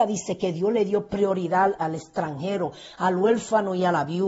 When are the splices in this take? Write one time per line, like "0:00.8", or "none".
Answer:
0:01.8